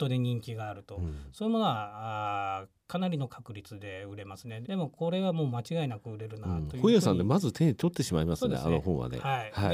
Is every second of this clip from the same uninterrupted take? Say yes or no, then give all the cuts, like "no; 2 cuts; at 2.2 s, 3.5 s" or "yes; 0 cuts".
no; 1 cut; at 4.6 s